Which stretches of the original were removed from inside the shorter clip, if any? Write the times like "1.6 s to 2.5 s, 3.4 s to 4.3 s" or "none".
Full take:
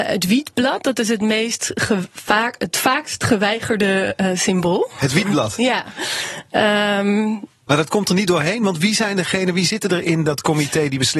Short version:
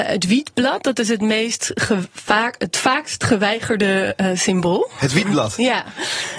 none